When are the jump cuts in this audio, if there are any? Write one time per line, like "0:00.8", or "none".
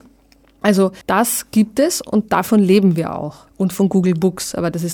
0:01.0
0:03.5